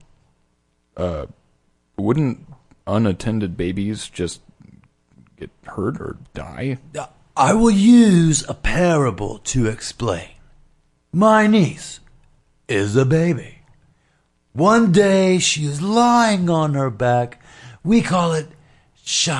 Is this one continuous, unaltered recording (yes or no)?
yes